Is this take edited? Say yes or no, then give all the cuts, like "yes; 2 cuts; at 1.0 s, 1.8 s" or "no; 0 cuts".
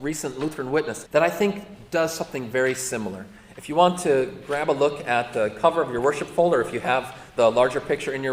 yes; 1 cut; at 1.1 s